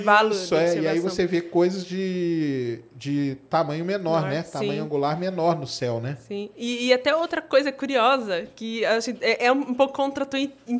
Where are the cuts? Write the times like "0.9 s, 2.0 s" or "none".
none